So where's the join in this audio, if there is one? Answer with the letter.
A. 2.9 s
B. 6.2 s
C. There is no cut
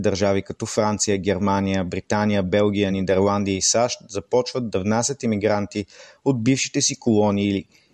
C